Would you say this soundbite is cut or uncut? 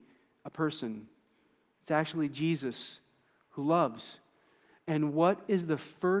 uncut